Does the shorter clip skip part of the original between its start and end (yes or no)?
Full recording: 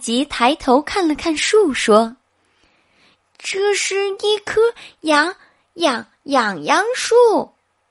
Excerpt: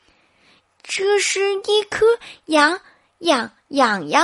no